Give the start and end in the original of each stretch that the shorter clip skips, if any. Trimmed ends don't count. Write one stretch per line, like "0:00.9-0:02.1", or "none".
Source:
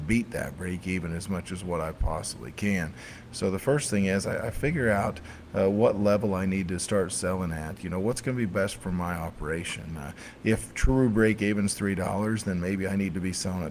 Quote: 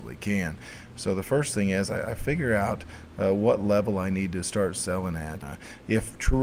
0:07.8-0:10.0